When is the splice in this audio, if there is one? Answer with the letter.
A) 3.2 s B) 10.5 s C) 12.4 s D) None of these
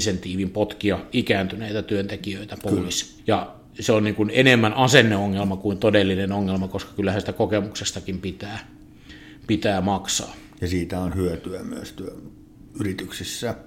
A